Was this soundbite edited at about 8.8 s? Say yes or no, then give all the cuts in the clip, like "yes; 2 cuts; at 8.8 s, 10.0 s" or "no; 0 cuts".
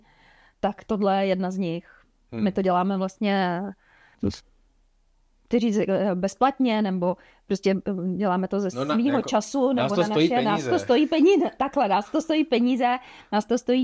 no; 1 cut; at 4.1 s